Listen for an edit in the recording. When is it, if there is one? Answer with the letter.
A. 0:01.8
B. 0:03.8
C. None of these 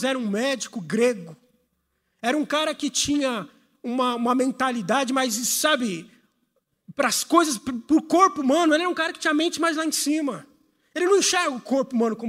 C